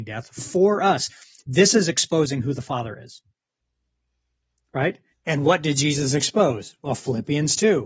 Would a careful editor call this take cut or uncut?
cut